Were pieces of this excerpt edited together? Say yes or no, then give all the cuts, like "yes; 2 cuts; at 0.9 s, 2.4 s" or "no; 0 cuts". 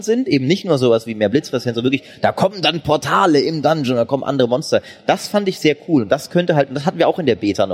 no; 0 cuts